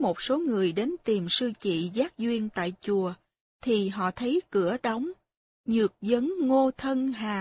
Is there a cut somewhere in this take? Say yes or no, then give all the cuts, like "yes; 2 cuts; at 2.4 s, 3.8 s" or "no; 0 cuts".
yes; 1 cut; at 5.5 s